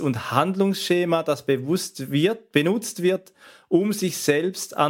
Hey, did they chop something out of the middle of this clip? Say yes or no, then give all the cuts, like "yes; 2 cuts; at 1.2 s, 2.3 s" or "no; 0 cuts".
no; 0 cuts